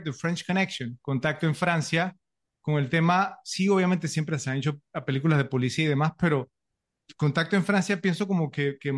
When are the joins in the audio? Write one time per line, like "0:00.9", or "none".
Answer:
none